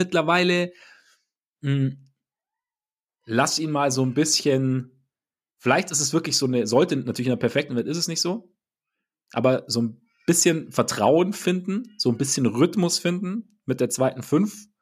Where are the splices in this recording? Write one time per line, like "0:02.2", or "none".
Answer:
none